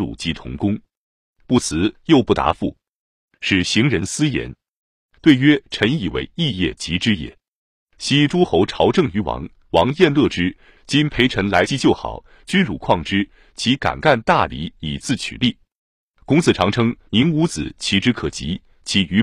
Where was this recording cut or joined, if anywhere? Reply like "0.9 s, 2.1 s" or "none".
10.8 s